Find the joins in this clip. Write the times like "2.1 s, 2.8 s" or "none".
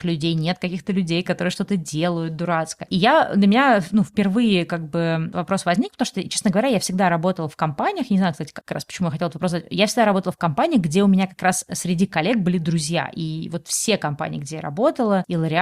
8.6 s